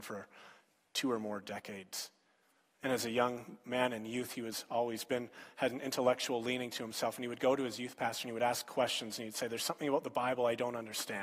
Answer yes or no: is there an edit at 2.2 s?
no